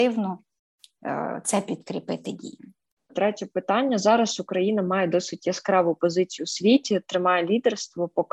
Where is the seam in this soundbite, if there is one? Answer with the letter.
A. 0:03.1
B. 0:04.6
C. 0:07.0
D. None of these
A